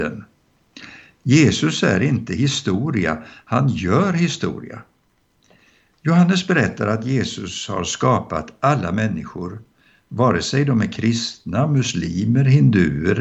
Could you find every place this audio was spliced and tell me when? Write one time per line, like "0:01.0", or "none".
none